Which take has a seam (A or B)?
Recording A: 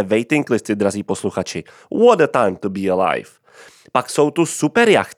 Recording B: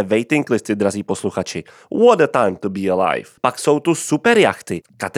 B